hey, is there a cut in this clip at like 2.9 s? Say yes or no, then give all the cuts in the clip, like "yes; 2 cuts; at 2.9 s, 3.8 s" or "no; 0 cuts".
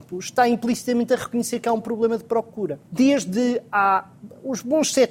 yes; 1 cut; at 2.9 s